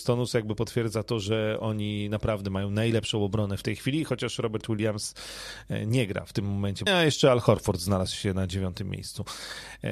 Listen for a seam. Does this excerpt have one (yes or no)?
yes